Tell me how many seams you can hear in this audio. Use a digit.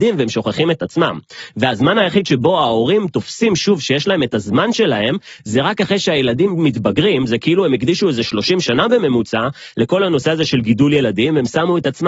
0